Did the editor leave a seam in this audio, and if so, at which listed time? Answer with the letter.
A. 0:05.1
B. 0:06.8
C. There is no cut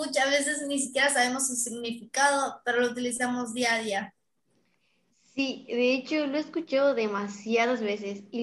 C